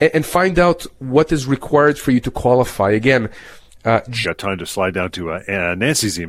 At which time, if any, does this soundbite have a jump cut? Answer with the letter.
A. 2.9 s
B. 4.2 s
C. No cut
B